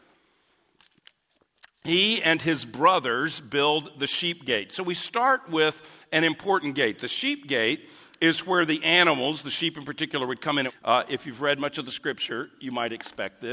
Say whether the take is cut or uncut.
cut